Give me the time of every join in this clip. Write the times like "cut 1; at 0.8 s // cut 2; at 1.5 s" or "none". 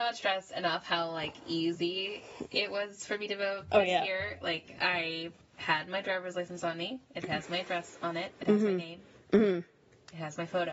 none